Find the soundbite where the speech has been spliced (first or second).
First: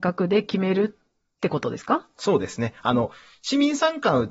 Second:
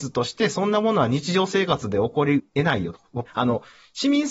second